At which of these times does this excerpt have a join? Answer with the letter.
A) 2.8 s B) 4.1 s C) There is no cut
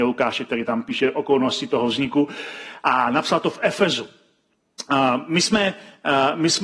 A